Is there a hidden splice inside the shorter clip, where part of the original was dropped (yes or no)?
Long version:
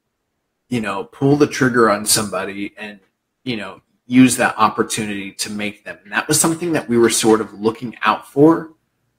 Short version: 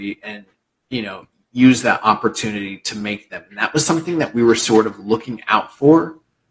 no